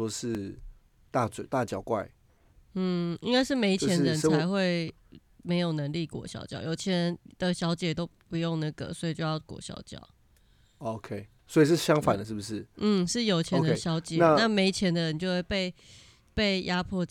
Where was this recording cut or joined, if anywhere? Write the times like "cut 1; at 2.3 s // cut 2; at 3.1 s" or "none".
none